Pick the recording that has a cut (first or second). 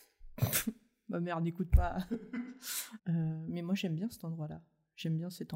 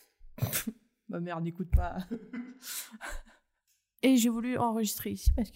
first